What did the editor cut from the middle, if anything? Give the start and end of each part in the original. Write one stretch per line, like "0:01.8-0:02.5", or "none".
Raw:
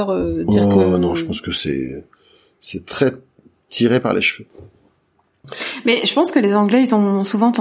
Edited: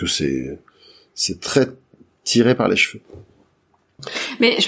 none

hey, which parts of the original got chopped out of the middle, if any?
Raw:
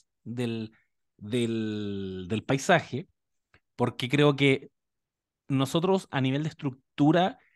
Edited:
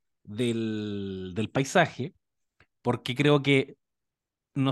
none

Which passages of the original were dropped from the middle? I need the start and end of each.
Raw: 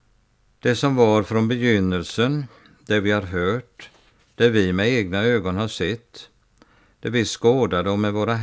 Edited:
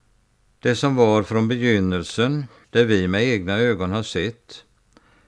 0:02.6-0:04.3

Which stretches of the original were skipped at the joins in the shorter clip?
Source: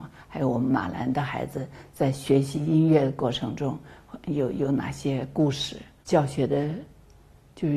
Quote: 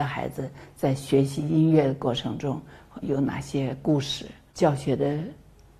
0:04.2-0:04.5

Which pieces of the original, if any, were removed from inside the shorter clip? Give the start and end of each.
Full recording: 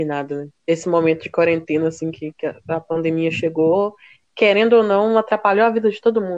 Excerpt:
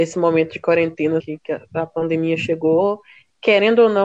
0:01.9-0:02.1

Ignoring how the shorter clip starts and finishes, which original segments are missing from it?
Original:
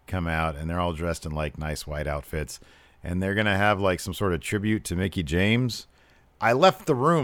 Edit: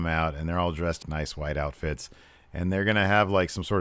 0:01.2-0:01.5

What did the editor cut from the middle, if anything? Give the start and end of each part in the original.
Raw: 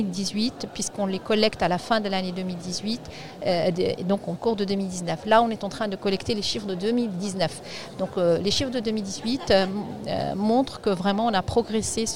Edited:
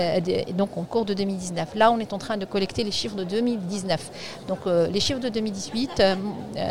none

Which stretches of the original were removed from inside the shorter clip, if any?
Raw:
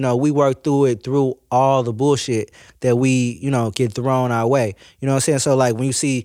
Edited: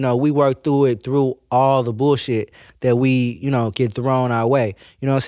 none

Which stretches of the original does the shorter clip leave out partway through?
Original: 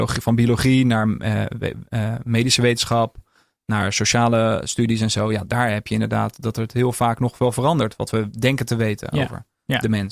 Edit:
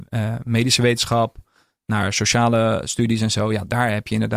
none

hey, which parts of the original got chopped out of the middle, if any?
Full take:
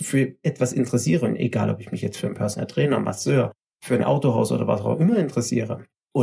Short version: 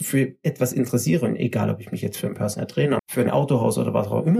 0:03.0-0:03.7

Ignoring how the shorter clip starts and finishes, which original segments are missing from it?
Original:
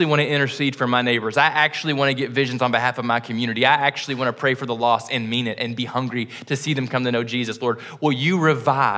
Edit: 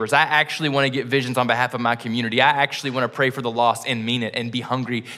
none

